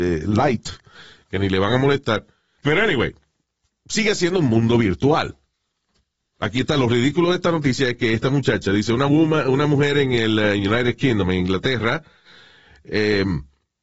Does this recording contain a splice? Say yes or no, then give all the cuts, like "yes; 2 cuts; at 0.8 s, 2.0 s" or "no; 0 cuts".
yes; 1 cut; at 2.6 s